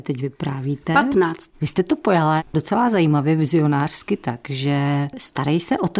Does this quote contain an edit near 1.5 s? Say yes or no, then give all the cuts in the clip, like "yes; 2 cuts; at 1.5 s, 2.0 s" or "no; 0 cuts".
yes; 1 cut; at 1.5 s